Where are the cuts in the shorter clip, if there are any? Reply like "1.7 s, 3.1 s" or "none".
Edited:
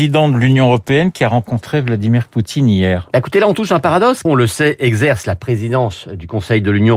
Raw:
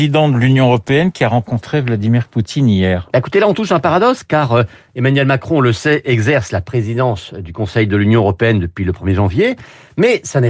4.3 s